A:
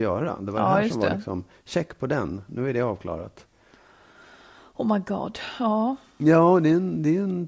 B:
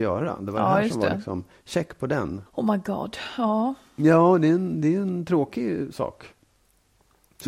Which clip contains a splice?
B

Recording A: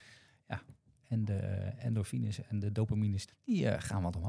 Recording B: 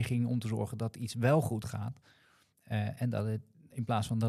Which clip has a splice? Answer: A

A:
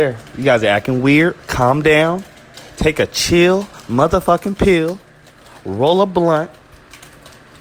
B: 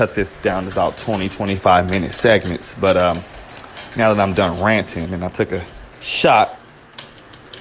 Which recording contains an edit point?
B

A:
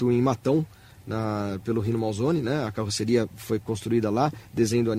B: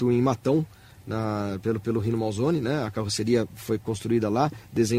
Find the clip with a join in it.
A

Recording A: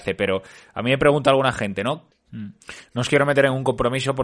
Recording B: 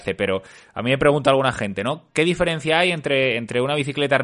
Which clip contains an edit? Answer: A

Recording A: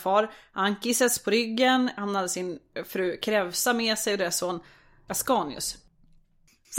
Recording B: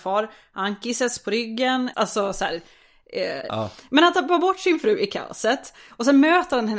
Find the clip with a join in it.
B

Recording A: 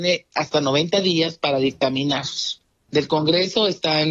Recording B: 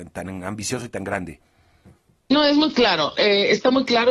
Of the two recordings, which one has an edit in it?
A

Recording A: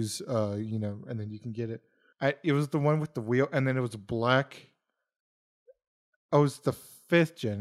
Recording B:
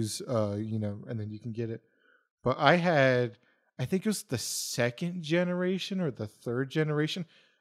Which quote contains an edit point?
A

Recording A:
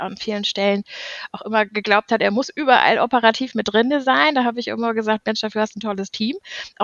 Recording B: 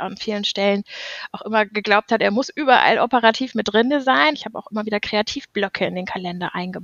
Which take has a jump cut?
B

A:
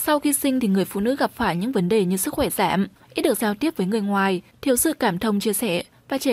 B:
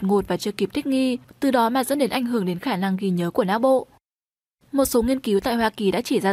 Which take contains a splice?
A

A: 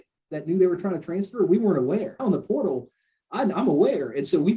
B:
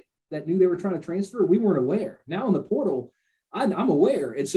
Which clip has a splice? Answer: A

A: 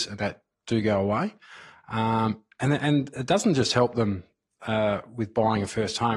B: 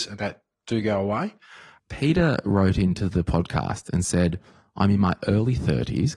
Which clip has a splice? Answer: B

